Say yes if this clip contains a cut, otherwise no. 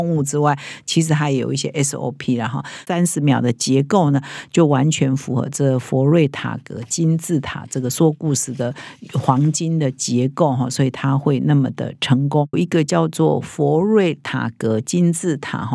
yes